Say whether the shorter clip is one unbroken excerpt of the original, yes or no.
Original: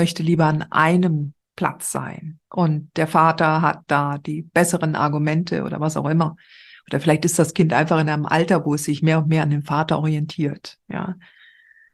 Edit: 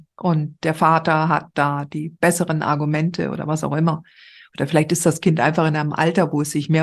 yes